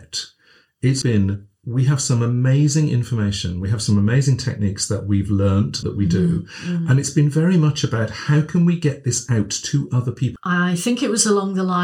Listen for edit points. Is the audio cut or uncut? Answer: cut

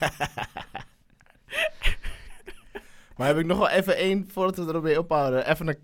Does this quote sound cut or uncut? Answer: uncut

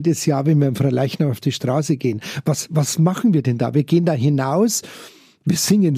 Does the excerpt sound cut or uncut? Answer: uncut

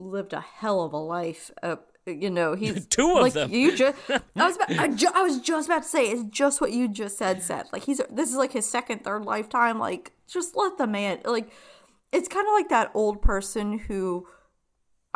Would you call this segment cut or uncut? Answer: uncut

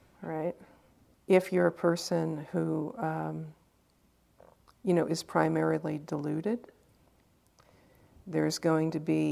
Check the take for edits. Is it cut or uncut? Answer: cut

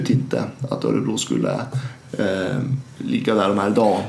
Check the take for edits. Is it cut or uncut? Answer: uncut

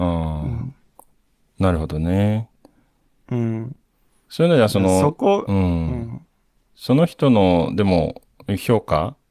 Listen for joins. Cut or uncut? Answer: uncut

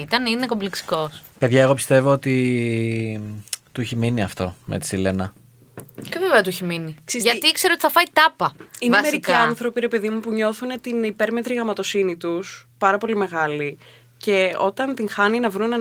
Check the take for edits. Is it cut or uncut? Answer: uncut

